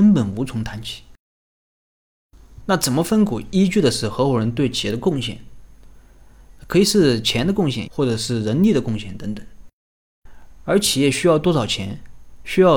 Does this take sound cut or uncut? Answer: cut